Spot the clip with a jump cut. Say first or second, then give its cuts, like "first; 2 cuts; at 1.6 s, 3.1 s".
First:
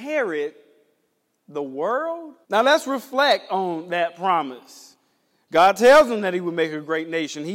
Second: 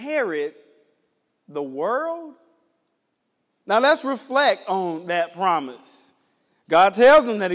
first; 1 cut; at 2.4 s